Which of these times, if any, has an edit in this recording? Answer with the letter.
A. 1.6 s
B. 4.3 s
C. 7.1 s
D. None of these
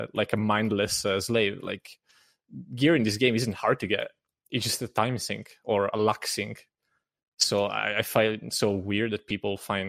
D